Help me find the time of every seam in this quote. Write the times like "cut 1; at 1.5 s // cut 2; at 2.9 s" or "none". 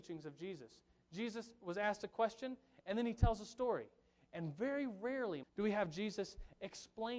cut 1; at 5.4 s

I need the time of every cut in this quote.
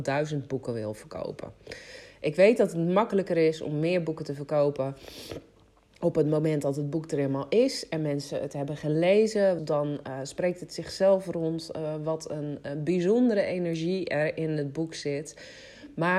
cut 1; at 9.6 s

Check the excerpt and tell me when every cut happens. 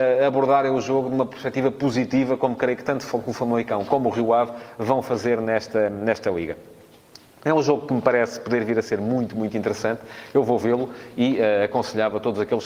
none

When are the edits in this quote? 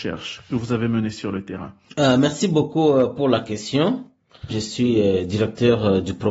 cut 1; at 4.5 s

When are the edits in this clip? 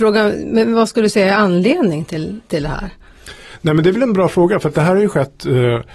none

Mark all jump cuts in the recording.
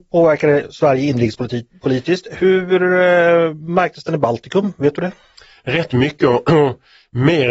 none

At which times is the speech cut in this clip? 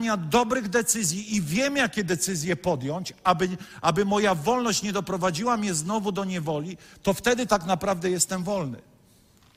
none

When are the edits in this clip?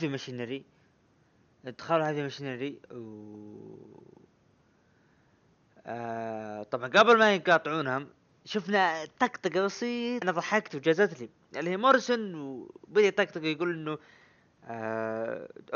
cut 1; at 10.2 s

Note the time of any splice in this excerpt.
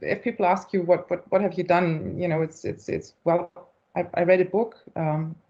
none

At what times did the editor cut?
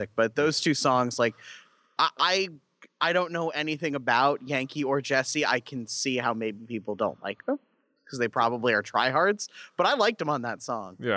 none

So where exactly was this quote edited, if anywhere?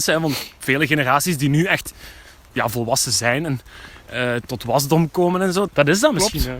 cut 1; at 4.5 s // cut 2; at 5.7 s

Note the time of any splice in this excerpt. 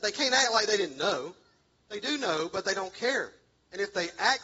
none

